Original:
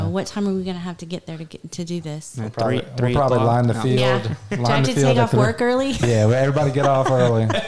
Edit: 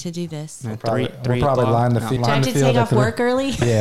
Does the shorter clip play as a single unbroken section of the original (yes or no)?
no